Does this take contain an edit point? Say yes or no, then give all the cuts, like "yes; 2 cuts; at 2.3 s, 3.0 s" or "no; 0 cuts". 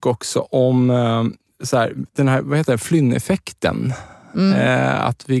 no; 0 cuts